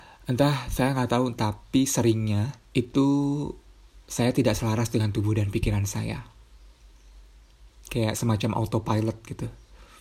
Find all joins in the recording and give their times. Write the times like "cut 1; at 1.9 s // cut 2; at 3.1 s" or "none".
cut 1; at 1.4 s // cut 2; at 2.7 s